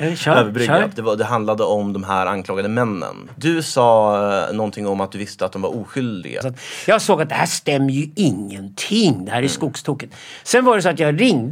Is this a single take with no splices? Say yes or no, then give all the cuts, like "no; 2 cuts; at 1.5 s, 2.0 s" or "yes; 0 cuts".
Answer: no; 1 cut; at 6.4 s